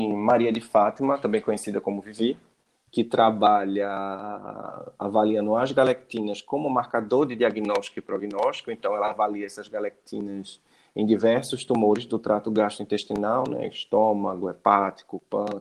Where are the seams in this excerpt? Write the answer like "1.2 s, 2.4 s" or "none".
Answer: none